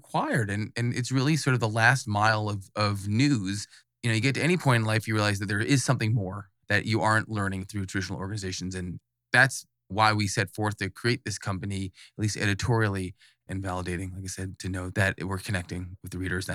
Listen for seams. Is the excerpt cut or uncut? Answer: cut